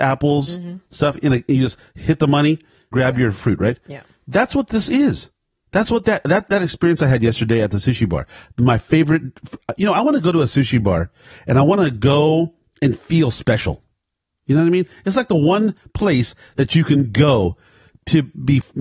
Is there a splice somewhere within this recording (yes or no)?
yes